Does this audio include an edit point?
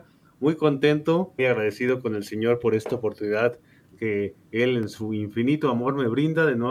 yes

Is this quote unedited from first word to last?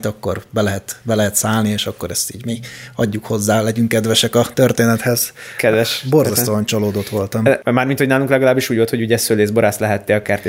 no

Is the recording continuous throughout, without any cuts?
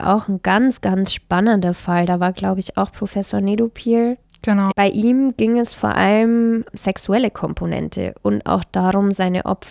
no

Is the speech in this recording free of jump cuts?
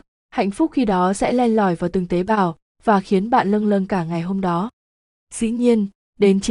yes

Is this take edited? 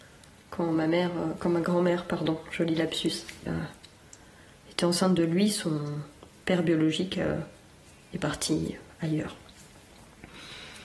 yes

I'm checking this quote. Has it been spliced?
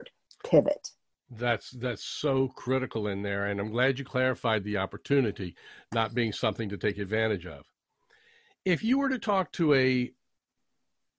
no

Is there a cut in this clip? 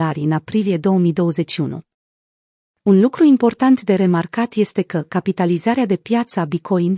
yes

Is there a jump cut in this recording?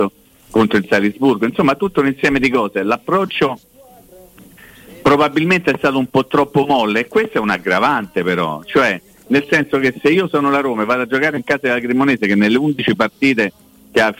no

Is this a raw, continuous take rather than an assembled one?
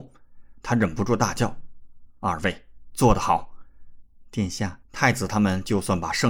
no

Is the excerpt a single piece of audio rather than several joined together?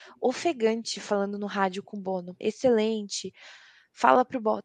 no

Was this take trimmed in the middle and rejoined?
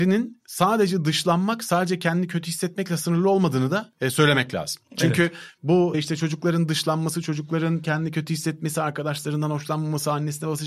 no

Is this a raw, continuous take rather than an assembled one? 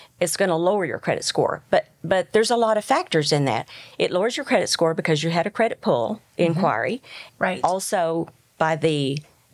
no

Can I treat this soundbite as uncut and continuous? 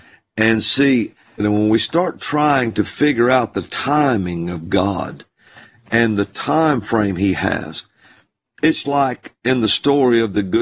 no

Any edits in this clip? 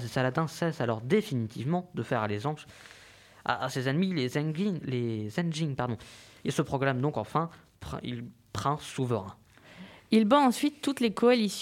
no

